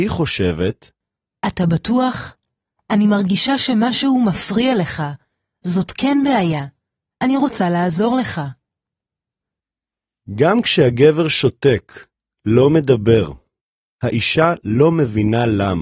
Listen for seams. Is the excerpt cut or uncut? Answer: uncut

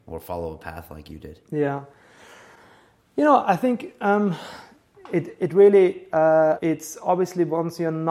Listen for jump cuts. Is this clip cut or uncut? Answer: cut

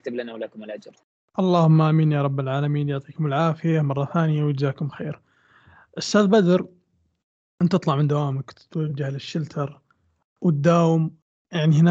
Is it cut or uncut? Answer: uncut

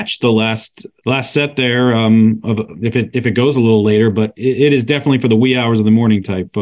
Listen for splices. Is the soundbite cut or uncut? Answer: cut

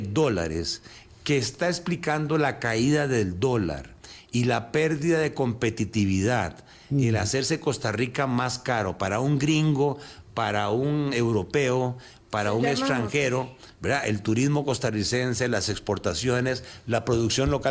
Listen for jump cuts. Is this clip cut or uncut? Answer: uncut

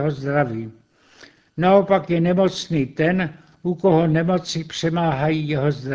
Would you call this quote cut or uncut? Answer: uncut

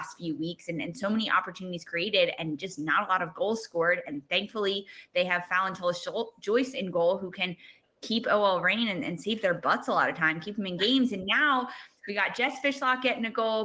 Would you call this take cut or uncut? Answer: uncut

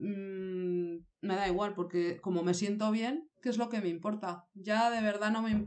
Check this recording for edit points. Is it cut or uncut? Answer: cut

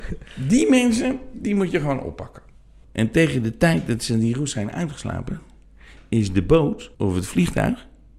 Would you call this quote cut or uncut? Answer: cut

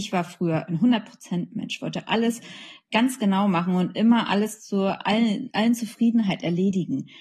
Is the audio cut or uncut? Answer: uncut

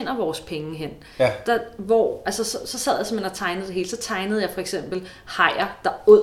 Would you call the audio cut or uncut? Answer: uncut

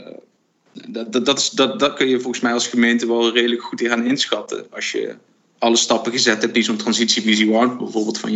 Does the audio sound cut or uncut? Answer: uncut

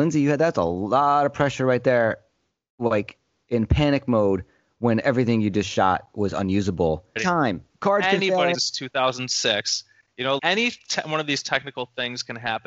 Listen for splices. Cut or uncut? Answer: cut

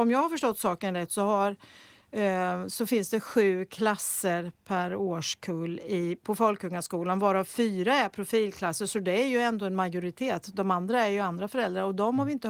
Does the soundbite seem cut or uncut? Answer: uncut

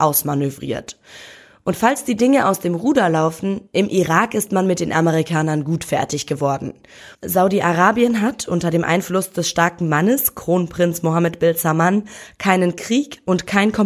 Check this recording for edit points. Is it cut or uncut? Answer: cut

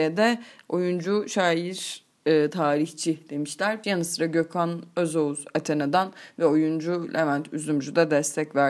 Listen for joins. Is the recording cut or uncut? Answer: cut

